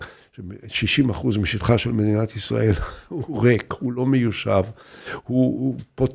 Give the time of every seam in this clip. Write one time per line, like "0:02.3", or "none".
none

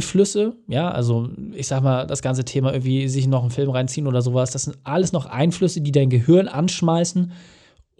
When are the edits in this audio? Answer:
none

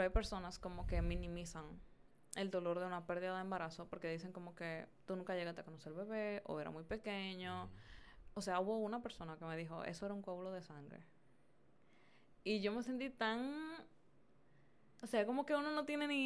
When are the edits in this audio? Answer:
none

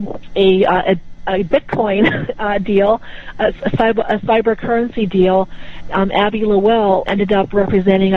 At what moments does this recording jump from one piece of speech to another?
0:05.9
0:07.1

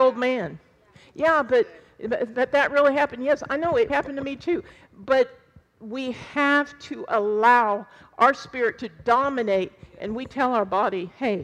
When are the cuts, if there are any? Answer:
0:03.9

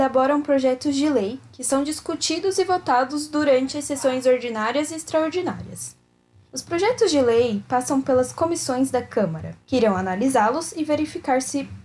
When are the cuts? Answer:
0:06.5
0:09.6

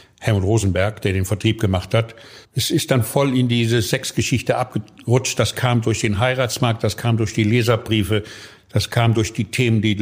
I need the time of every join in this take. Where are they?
0:02.4

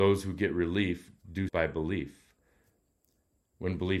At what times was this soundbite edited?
0:01.5

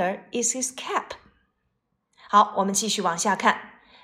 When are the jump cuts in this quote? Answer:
none

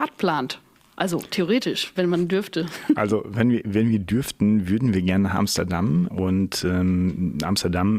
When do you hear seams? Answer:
0:06.1

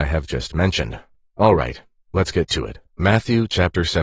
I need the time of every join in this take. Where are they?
0:02.9

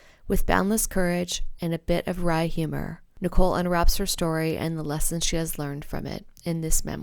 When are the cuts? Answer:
0:01.6

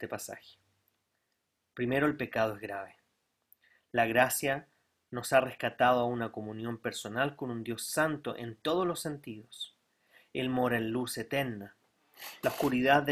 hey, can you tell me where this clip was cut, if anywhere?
none

